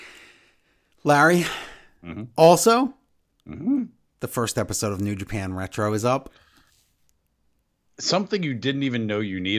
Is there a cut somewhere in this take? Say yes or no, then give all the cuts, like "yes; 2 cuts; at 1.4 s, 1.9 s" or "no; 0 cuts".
no; 0 cuts